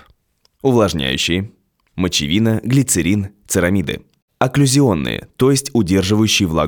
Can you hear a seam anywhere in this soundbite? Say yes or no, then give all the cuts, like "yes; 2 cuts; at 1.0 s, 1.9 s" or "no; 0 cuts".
no; 0 cuts